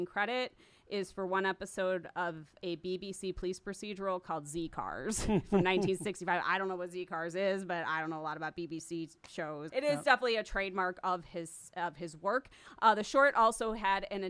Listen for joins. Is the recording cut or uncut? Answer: cut